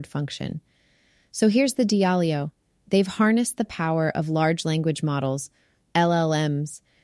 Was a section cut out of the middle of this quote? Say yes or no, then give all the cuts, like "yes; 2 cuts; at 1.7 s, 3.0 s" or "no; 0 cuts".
no; 0 cuts